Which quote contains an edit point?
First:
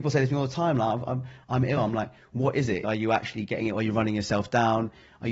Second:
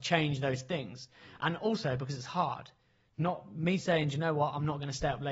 first; 2 cuts; at 1.8 s, 2.8 s

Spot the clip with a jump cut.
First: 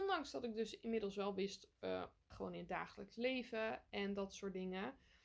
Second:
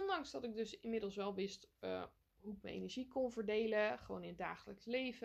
first; 1 cut; at 2.3 s

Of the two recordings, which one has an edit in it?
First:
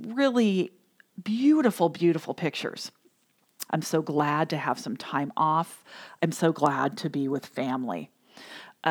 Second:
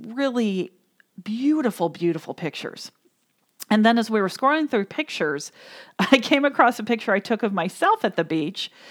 first; 1 cut; at 3.7 s

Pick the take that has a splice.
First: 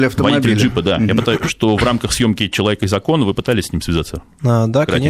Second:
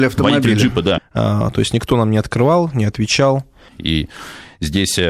second; 2 cuts; at 1.0 s, 3.7 s

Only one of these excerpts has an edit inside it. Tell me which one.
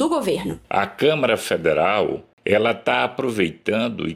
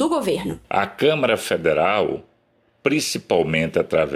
first; 1 cut; at 2.3 s

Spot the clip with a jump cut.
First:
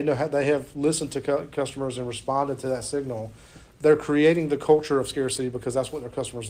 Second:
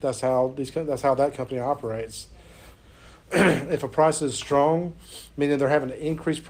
second; 1 cut; at 2.7 s

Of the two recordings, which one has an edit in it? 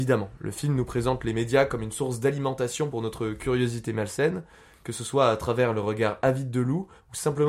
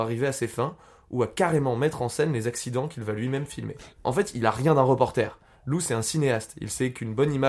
second; 1 cut; at 3.9 s

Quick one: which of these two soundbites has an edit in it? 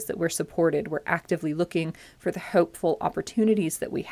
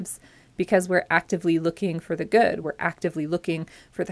second; 1 cut; at 2.6 s

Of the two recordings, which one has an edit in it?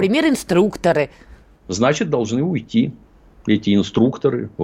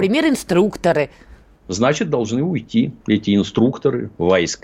second; 1 cut; at 3.0 s

